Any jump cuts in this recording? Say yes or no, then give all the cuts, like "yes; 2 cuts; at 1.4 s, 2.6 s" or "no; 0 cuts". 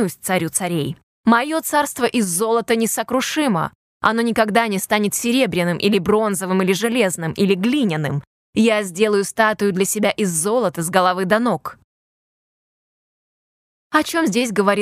no; 0 cuts